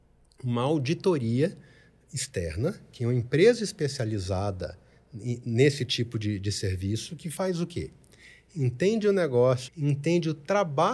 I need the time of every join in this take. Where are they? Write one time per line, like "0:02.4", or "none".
0:09.7